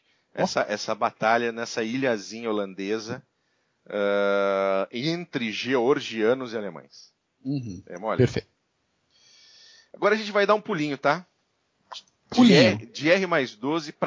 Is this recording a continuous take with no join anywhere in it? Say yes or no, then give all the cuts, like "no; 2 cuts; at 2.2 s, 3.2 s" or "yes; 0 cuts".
yes; 0 cuts